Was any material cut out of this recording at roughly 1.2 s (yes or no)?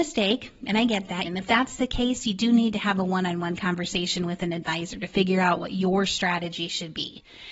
yes